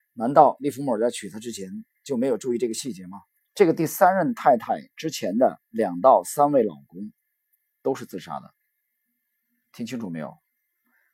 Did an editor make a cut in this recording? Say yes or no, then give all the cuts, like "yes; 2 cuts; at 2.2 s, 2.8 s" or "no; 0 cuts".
yes; 1 cut; at 3.5 s